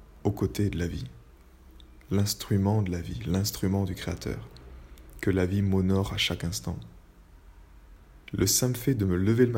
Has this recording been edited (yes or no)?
yes